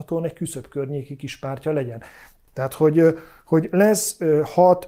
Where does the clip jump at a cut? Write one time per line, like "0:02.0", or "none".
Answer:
0:02.5